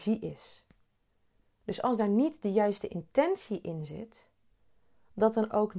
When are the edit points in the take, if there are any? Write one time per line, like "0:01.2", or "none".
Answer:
none